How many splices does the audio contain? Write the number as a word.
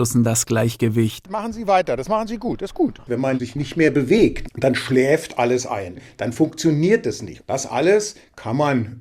three